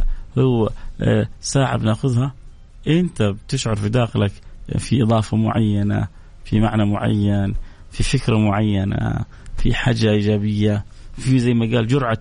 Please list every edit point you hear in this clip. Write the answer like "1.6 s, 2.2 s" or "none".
none